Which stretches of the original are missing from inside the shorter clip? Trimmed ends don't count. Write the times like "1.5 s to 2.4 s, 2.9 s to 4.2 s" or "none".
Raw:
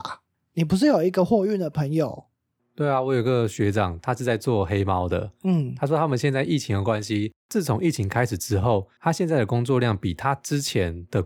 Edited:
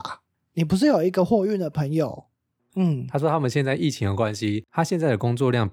2.7 s to 5.4 s, 7.4 s to 9.0 s

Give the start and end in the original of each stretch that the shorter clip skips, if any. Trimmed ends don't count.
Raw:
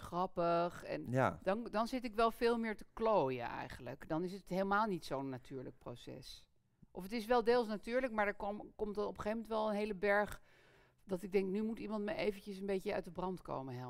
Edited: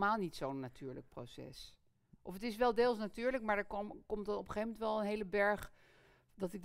none

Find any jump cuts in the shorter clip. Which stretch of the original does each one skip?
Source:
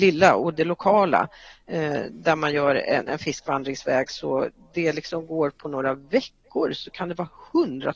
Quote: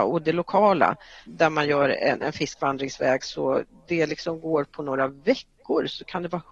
1.6 s to 2.1 s

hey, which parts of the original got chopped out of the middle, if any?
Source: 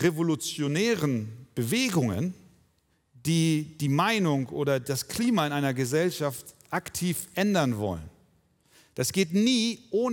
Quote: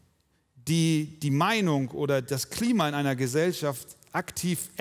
none

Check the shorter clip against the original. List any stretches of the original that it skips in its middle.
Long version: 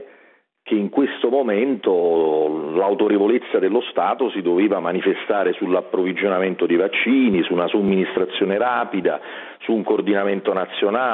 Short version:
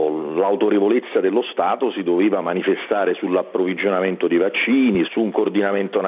7.4 s to 9.6 s

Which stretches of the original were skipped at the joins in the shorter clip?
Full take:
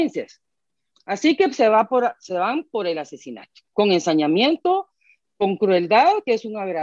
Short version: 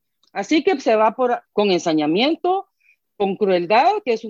2.2 s to 3.7 s

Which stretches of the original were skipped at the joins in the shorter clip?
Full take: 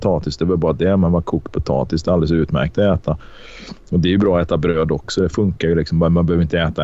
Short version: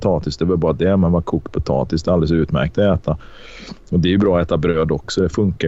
none

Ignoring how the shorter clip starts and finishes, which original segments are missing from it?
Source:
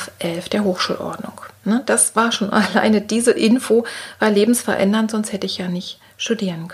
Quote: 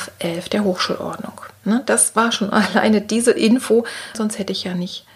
4.1 s to 5.1 s

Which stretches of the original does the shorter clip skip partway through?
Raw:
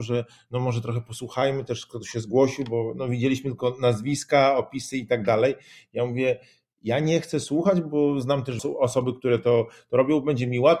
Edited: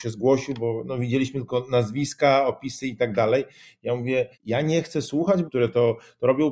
6.4 s to 6.7 s, 7.8 s to 9.2 s

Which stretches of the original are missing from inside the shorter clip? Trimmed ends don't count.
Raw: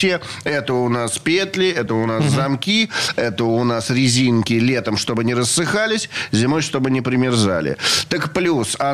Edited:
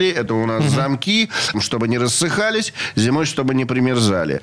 3.1 s to 4.9 s

